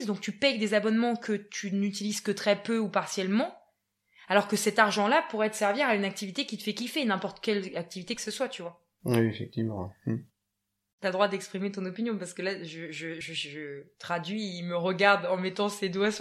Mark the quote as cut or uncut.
uncut